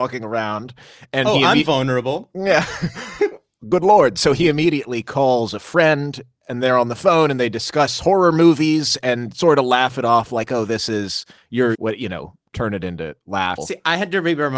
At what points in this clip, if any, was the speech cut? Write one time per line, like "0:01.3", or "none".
0:11.7
0:13.6